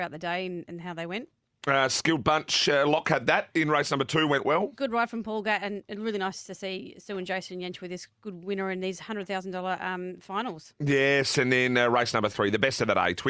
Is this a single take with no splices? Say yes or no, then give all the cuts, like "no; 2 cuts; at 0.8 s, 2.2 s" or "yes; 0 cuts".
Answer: yes; 0 cuts